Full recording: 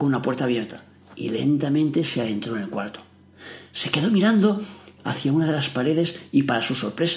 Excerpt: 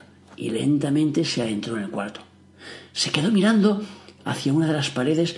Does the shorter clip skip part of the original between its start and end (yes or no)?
no